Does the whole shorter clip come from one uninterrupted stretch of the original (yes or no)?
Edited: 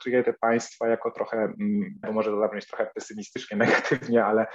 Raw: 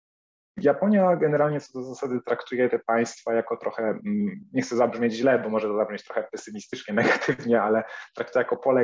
no